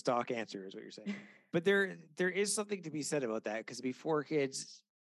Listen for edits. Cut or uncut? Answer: uncut